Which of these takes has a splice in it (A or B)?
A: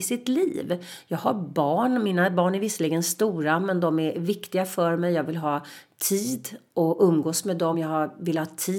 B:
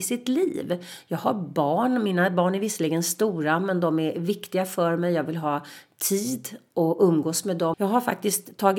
B